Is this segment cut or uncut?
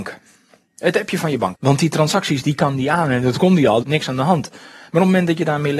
cut